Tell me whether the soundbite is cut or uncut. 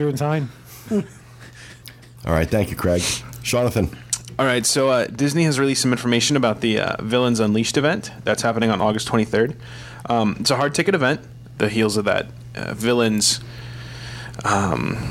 cut